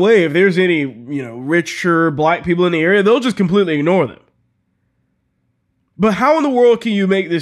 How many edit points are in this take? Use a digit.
0